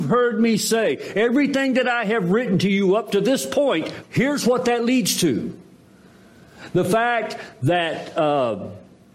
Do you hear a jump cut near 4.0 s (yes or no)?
yes